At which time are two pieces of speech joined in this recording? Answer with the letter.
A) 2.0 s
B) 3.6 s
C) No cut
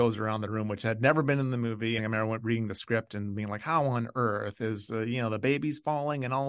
A